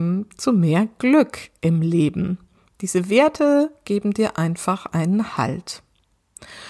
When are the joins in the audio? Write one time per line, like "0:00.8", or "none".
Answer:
none